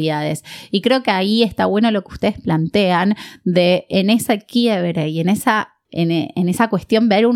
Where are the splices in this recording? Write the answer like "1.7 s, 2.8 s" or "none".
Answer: none